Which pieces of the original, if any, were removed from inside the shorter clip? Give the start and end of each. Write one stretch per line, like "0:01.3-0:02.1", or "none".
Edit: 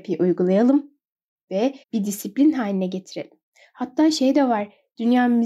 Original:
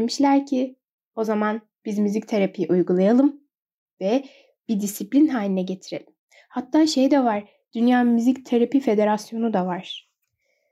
0:04.3-0:04.6